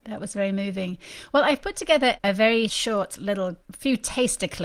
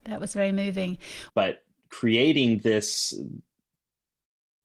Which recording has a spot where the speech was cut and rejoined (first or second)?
second